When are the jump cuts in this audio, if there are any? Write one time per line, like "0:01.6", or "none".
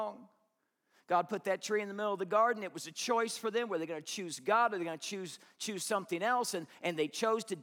none